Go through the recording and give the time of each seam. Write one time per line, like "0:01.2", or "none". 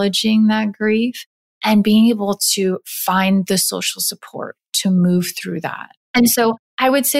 0:06.0